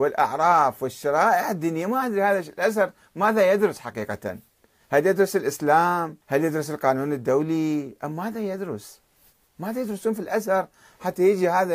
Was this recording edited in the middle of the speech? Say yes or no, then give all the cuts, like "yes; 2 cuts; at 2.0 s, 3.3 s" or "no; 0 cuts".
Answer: yes; 1 cut; at 6.2 s